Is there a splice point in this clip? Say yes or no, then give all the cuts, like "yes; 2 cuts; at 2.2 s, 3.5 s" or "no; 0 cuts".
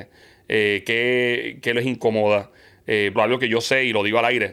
yes; 1 cut; at 3.2 s